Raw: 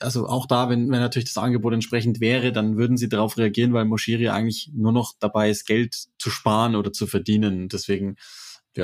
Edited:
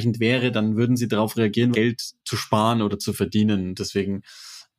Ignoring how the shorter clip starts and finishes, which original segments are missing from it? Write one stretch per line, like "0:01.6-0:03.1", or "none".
0:03.7-0:05.7